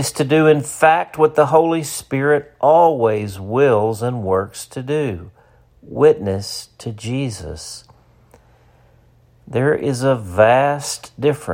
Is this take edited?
no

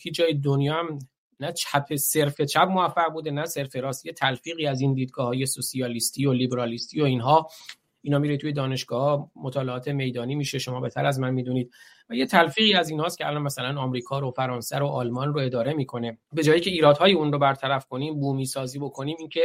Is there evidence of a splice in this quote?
yes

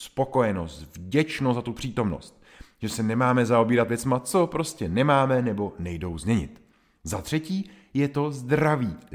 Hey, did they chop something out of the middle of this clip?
no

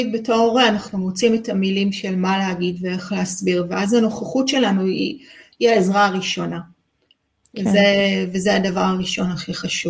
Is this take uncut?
yes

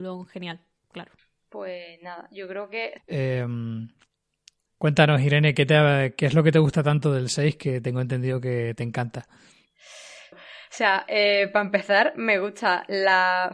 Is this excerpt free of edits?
no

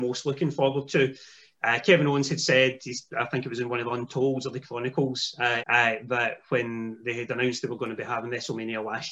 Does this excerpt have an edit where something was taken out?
yes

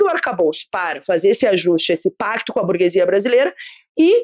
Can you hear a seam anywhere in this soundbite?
no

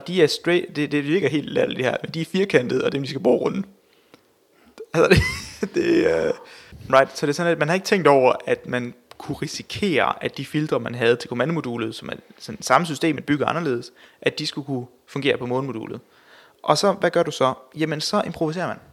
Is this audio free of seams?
yes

